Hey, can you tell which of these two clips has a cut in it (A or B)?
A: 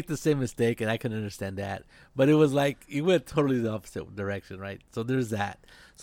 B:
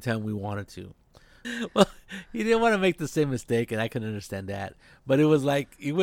B